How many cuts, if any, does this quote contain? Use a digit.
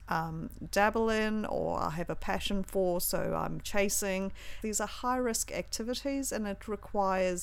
1